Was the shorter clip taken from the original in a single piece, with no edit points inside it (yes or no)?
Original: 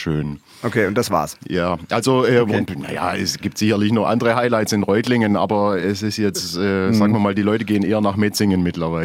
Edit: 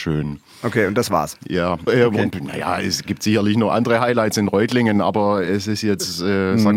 no